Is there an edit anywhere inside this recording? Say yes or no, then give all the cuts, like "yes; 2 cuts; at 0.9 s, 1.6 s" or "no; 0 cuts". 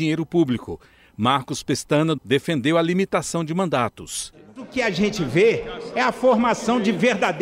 yes; 1 cut; at 2.2 s